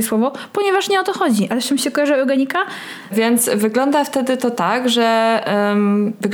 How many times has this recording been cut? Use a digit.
1